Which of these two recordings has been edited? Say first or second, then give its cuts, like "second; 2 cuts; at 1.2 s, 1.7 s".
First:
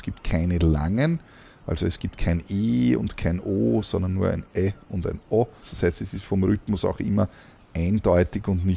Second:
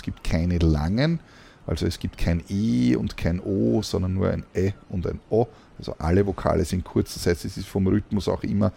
first; 1 cut; at 5.6 s